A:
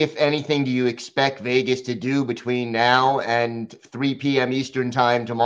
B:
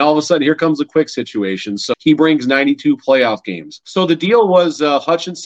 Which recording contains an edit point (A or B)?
B